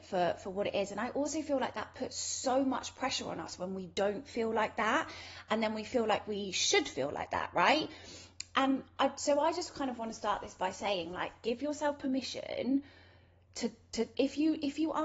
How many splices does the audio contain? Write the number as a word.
one